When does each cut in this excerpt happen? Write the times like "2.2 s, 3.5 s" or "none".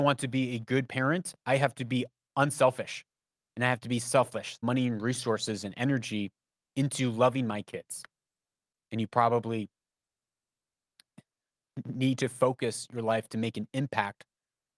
4.6 s, 8.7 s